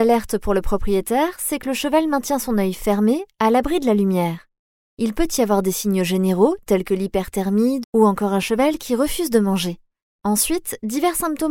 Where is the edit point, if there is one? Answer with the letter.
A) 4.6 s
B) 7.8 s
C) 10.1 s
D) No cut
B